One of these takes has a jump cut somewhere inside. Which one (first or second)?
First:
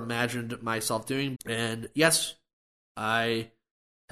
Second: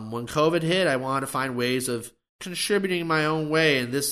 first